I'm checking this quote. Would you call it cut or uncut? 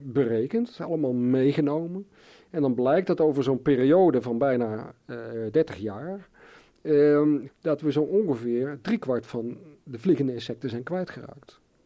cut